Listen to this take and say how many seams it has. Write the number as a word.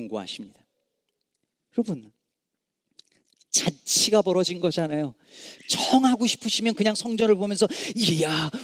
one